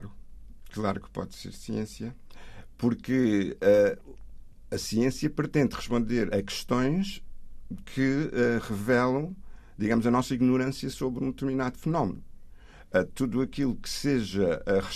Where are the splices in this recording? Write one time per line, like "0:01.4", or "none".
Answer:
0:06.3

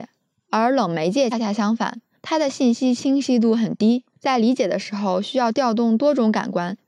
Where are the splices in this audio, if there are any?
0:01.3

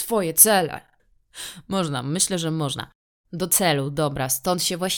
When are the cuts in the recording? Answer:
0:01.0

